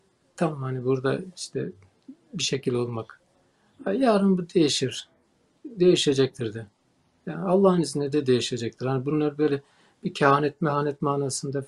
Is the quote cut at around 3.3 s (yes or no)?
no